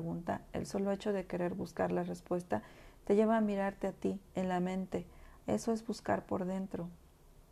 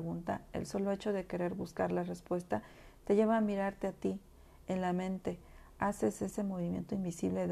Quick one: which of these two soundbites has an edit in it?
first; 2 cuts; at 4.3 s, 5.4 s

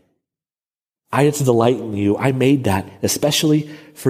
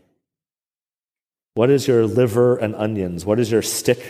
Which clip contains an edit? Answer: first; 1 cut; at 1.0 s

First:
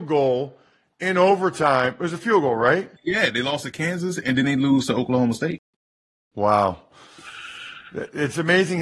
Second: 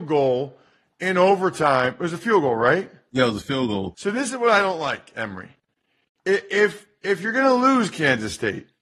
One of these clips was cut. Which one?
first; 1 cut; at 3.0 s

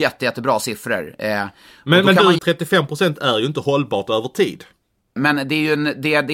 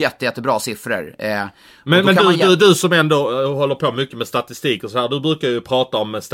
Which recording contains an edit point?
first; 2 cuts; at 2.4 s, 5.2 s

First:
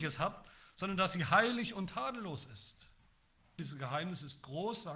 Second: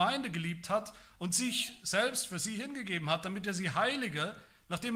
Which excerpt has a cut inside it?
first; 1 cut; at 3.6 s

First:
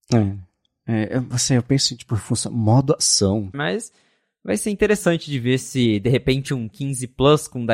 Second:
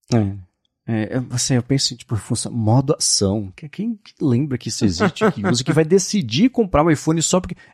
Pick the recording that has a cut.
first; 1 cut; at 3.5 s

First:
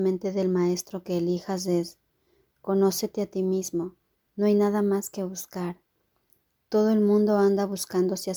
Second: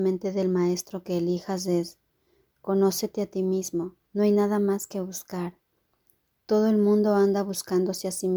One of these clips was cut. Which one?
second; 1 cut; at 4.1 s

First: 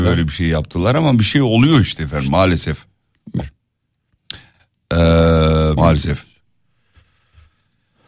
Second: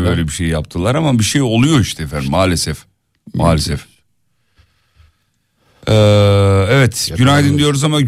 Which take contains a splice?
first; 2 cuts; at 3.4 s, 5.8 s

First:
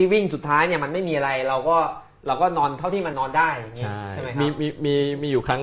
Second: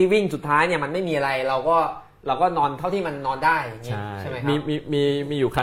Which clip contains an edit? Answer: first; 1 cut; at 3.1 s

